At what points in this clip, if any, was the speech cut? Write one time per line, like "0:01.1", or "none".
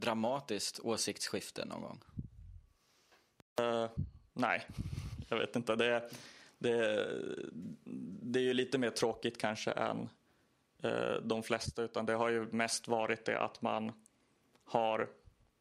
none